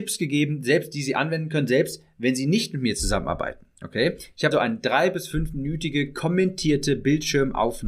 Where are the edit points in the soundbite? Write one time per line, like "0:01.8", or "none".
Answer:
0:04.5